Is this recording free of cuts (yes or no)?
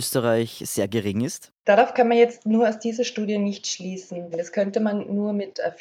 no